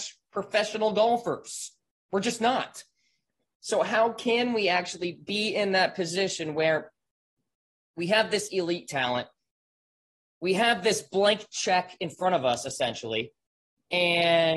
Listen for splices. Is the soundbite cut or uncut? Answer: uncut